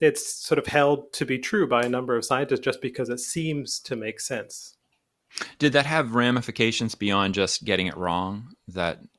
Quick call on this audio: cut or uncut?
uncut